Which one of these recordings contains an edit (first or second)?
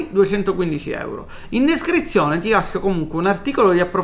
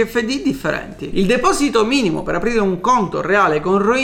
second